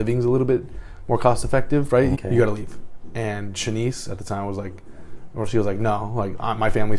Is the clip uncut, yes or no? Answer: no